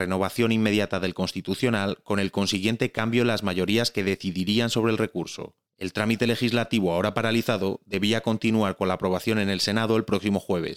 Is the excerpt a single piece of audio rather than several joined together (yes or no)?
yes